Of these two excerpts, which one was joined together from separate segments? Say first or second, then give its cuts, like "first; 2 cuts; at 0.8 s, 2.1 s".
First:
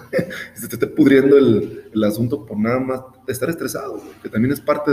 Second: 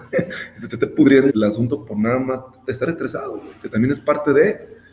second; 1 cut; at 1.3 s